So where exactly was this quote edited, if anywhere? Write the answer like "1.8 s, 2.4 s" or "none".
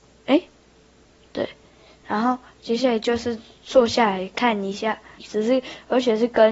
5.2 s